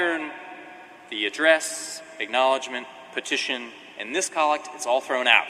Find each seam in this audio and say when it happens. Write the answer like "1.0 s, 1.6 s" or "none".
none